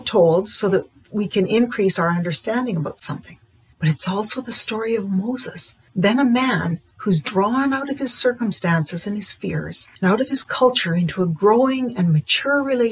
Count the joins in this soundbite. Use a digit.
3